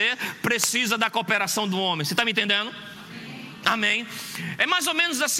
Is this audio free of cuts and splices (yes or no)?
yes